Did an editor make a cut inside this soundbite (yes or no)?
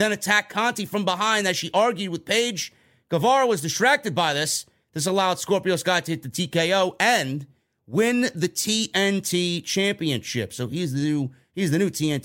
no